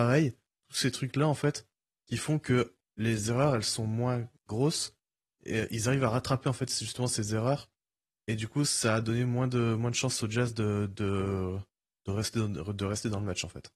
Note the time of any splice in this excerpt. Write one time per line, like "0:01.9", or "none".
none